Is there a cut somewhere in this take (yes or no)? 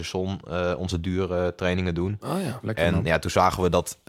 yes